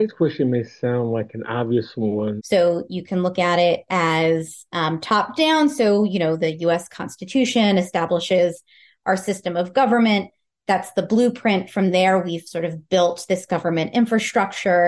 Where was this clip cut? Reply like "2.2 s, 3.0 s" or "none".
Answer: 2.4 s